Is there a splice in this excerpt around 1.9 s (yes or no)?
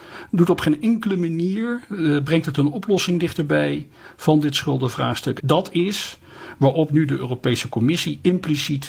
no